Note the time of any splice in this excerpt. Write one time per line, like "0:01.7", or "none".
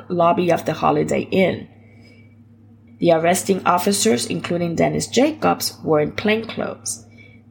0:02.9